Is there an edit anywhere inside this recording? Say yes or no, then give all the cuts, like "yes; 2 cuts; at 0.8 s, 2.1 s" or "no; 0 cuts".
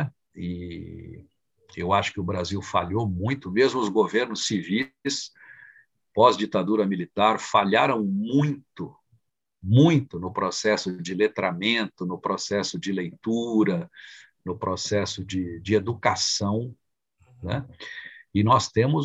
no; 0 cuts